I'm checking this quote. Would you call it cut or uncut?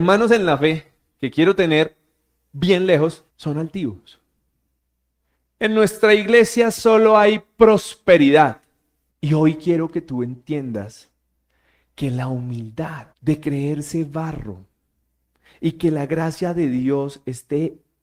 cut